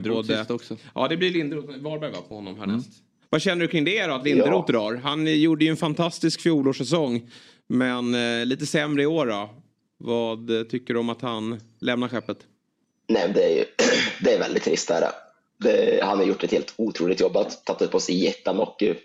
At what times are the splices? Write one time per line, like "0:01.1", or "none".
none